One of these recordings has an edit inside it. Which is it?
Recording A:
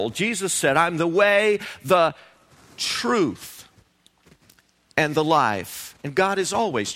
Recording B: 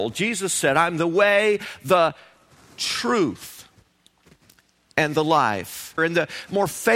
B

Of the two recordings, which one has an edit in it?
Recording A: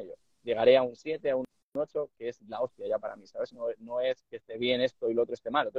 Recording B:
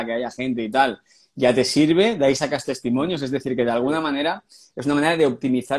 A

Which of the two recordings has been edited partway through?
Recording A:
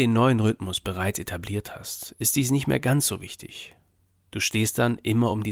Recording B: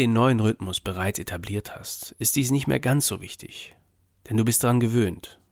A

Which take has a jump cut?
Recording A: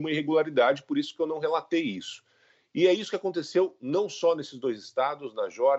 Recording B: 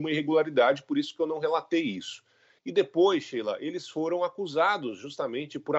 B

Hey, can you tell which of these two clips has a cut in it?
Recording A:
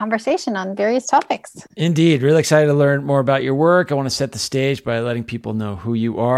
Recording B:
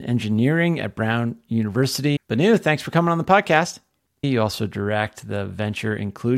B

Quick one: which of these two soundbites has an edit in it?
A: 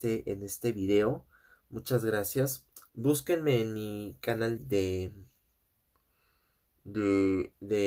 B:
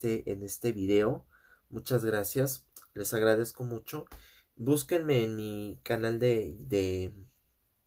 A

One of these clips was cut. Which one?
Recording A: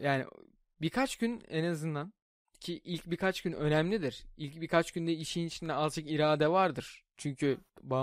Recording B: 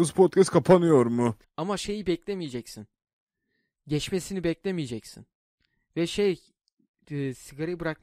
B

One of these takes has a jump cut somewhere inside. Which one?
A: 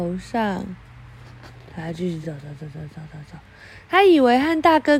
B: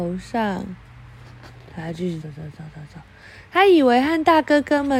B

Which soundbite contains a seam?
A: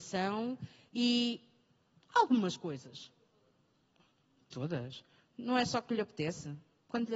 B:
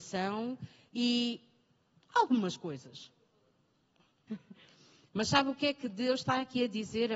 B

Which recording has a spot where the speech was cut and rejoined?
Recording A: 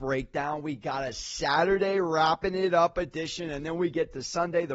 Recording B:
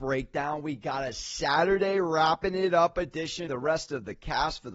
B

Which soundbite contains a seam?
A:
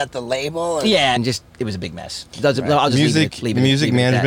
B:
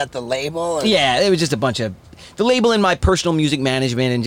A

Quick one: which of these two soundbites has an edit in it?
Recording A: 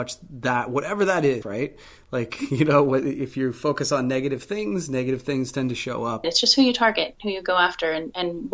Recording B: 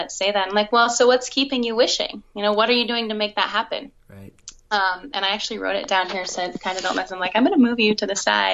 A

